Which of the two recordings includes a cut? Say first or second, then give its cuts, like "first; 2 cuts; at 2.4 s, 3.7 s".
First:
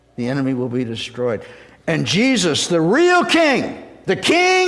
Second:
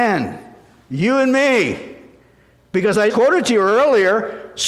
second; 1 cut; at 3.1 s